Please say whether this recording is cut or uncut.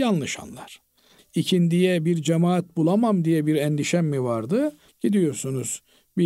cut